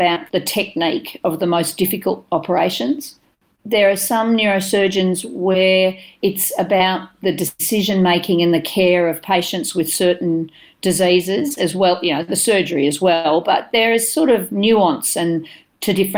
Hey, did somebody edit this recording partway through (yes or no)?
no